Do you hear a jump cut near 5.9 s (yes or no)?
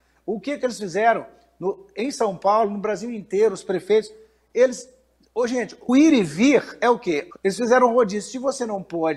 yes